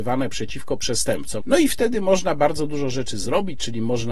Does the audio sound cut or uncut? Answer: cut